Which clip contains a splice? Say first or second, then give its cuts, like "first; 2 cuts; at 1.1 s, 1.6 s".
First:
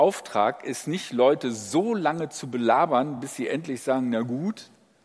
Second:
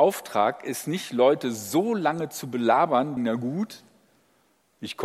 second; 1 cut; at 3.2 s